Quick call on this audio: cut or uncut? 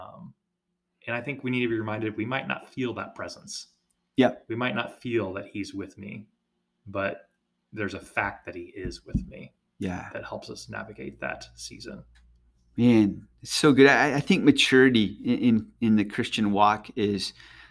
uncut